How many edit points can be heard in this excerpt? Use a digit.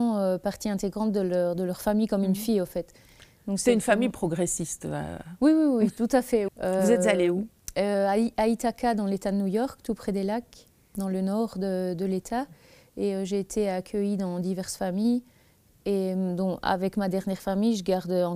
2